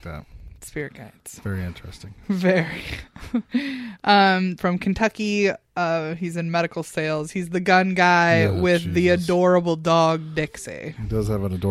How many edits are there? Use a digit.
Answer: 1